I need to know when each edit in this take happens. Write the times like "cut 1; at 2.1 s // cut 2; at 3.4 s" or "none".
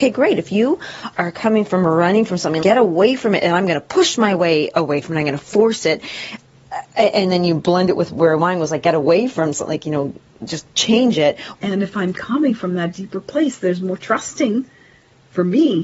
cut 1; at 2.6 s // cut 2; at 11.5 s